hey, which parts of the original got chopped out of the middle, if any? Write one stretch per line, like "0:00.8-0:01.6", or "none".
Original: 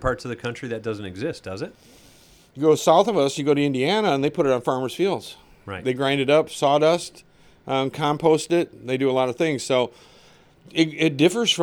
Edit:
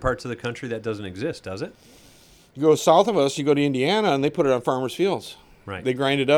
none